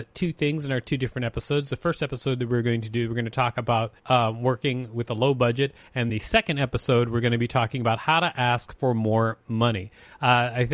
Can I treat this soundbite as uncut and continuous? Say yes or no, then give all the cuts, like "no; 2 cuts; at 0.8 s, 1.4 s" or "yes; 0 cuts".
no; 2 cuts; at 4.0 s, 6.1 s